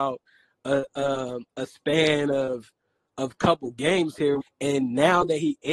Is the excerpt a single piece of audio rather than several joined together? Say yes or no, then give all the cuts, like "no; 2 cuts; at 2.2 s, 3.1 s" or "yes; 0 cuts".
no; 1 cut; at 4.4 s